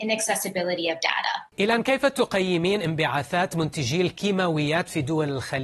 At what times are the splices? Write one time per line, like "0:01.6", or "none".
0:01.5